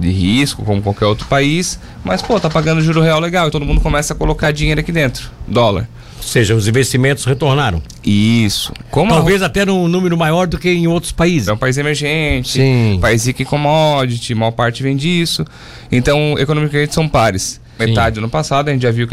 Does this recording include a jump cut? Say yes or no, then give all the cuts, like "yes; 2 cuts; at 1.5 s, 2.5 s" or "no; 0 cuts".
yes; 3 cuts; at 3.5 s, 11.5 s, 17.8 s